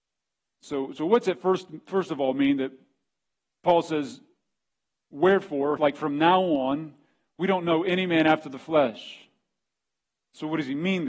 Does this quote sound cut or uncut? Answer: cut